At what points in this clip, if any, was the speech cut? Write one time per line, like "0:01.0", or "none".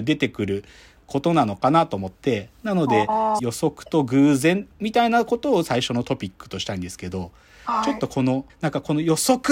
0:03.4
0:08.5

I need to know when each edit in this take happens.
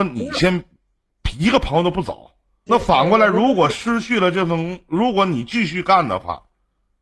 0:02.7

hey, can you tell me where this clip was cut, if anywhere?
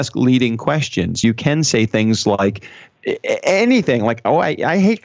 none

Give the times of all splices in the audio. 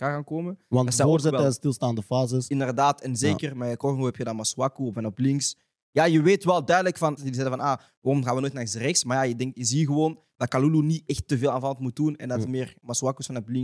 0:07.2

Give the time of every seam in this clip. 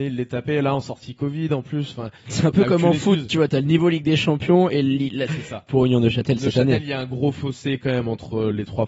0:05.3

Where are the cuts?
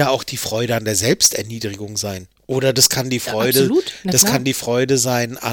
none

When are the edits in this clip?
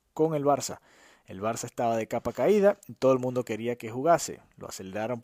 none

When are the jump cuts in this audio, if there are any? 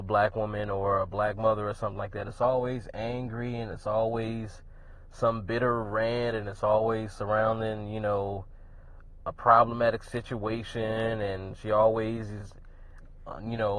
none

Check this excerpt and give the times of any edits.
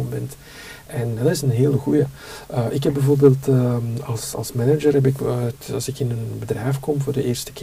none

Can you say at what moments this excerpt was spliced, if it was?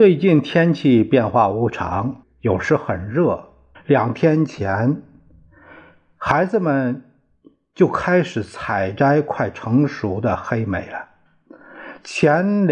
0:02.2
0:03.7

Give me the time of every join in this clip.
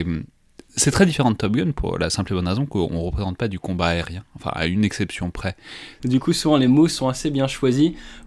0:06.0

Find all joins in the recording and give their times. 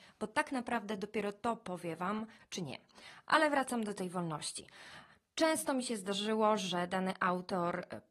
0:02.4

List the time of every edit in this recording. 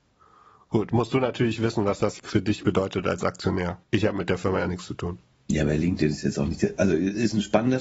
0:02.2
0:03.8

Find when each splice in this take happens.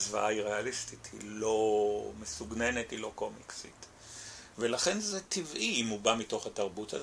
0:04.5

